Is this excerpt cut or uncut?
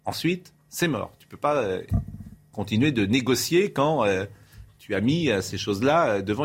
uncut